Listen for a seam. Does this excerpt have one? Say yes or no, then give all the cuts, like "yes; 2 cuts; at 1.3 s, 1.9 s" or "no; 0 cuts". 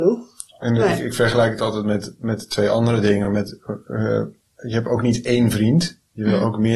no; 0 cuts